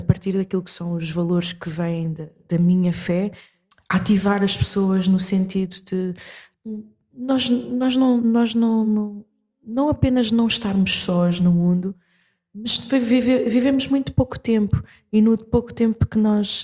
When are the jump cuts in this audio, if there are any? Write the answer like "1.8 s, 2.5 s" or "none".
none